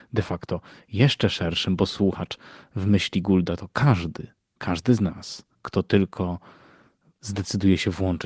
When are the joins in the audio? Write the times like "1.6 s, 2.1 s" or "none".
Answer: 5.5 s